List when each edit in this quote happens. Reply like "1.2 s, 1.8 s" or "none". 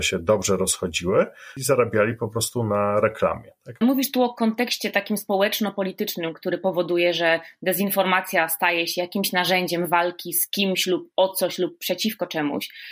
3.8 s